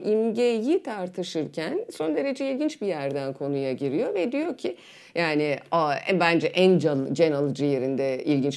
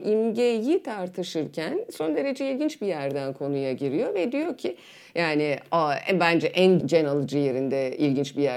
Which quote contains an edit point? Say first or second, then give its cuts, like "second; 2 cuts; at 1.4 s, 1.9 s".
second; 1 cut; at 6.8 s